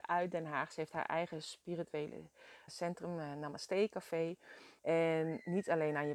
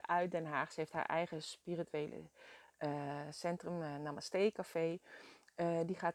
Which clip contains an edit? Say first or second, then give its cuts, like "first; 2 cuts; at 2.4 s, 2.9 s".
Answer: first; 2 cuts; at 2.7 s, 4.8 s